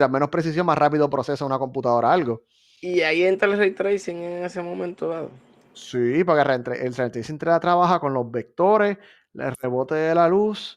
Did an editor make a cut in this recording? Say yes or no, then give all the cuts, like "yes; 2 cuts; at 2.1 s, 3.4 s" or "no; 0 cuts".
no; 0 cuts